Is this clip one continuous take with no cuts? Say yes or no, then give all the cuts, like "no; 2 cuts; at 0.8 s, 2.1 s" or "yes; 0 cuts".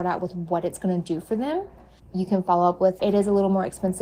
no; 2 cuts; at 2.0 s, 3.0 s